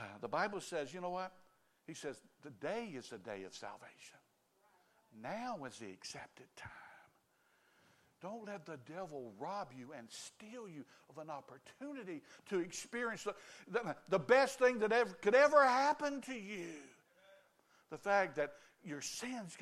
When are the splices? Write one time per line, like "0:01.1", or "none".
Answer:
none

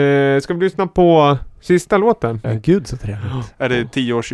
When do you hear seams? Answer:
0:02.4

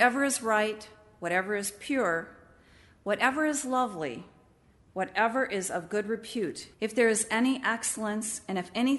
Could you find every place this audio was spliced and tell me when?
0:06.7

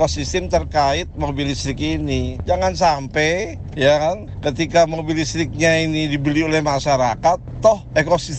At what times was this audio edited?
0:02.5

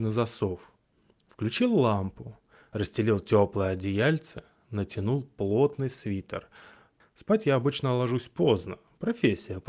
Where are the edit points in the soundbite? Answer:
0:07.0

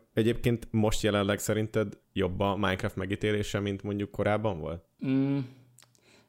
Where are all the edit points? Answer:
0:04.9

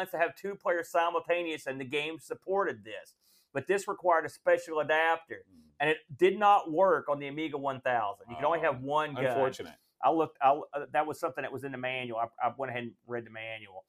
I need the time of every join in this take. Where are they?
none

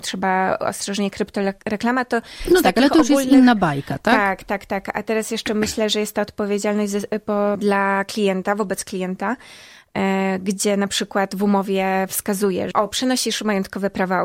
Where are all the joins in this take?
0:07.6
0:12.7

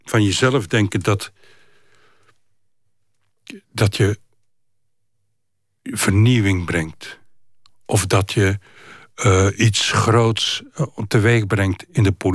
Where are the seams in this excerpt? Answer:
none

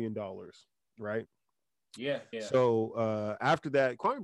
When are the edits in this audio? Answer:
0:02.3

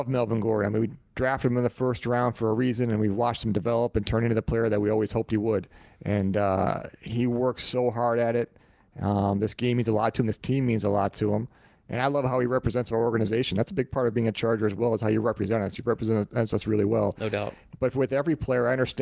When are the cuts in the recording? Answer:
0:00.9

